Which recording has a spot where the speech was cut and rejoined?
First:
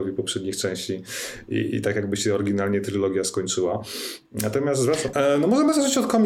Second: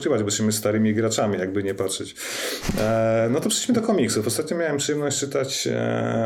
first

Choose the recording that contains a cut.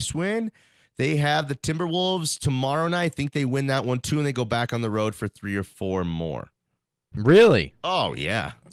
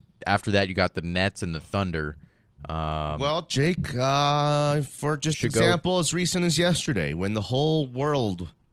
first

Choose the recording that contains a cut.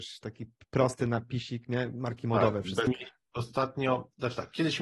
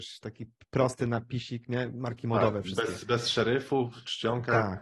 first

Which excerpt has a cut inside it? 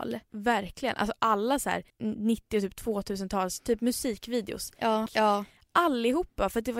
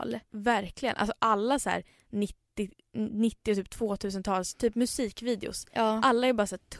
first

